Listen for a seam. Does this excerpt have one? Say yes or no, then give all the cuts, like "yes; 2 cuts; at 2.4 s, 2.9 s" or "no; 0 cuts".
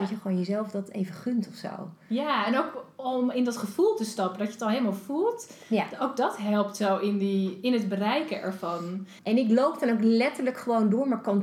yes; 1 cut; at 9.2 s